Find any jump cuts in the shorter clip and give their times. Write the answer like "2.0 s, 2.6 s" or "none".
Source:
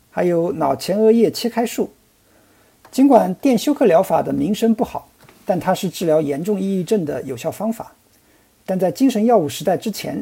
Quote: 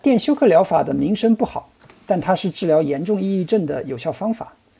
none